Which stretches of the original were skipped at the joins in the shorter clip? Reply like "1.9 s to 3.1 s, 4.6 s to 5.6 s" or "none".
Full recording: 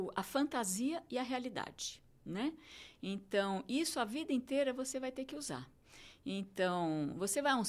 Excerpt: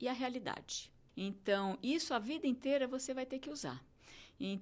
2.2 s to 2.9 s